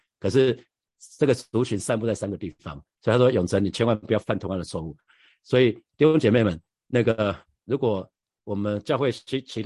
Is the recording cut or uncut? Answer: cut